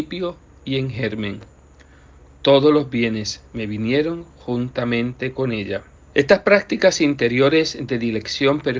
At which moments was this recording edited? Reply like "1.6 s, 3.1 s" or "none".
6.0 s